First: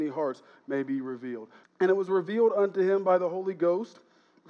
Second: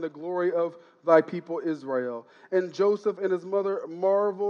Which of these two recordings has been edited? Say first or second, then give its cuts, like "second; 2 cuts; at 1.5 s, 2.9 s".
first; 1 cut; at 1.6 s